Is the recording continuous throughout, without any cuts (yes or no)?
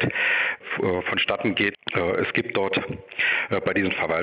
no